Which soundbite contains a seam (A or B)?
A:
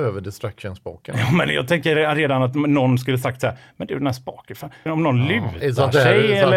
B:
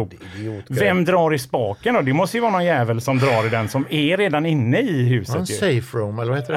A